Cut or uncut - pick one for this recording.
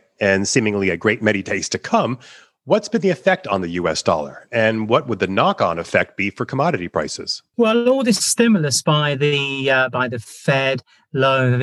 uncut